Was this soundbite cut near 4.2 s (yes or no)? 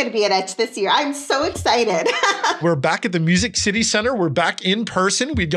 no